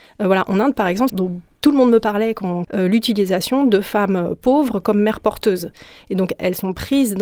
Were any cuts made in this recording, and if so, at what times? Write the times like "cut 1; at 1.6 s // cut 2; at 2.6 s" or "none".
cut 1; at 1.1 s // cut 2; at 2.6 s

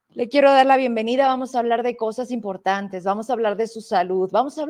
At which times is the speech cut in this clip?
none

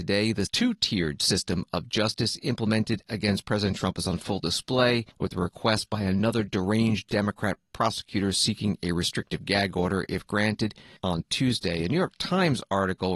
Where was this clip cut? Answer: cut 1; at 5.1 s // cut 2; at 11.0 s

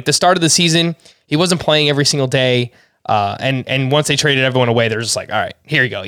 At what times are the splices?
none

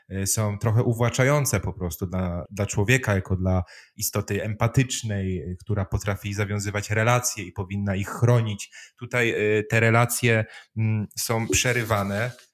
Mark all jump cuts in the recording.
cut 1; at 2.5 s

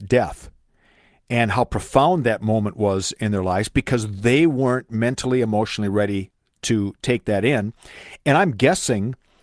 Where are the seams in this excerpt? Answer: none

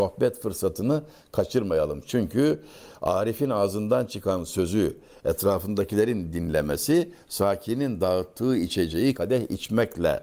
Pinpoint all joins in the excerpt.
cut 1; at 9.1 s

